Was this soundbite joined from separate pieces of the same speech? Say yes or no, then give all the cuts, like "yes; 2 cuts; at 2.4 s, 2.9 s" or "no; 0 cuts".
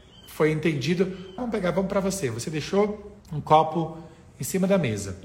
yes; 2 cuts; at 1.4 s, 3.2 s